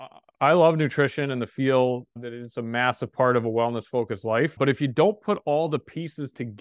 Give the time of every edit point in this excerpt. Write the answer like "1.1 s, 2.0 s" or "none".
none